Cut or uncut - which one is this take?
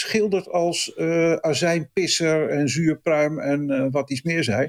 uncut